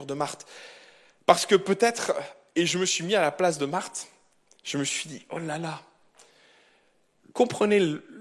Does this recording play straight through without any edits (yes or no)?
yes